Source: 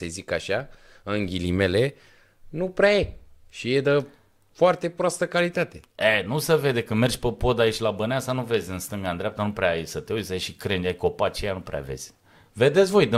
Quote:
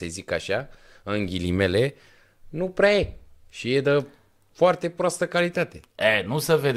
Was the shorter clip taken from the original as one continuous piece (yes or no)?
yes